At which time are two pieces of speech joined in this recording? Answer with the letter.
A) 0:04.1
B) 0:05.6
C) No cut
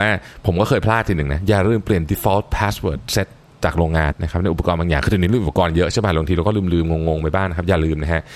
A